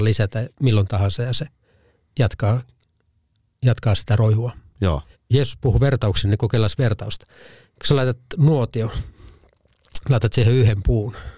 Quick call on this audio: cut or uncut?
cut